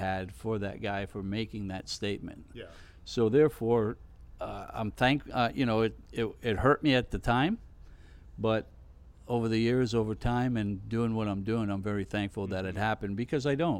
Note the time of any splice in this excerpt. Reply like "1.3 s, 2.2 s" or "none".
none